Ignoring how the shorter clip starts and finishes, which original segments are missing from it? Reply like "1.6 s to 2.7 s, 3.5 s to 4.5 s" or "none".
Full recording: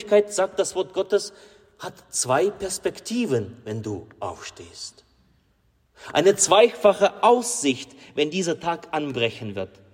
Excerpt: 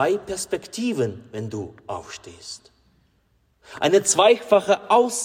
none